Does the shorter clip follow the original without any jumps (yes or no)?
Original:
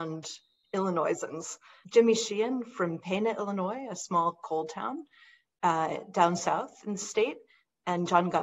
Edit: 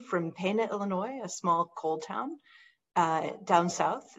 yes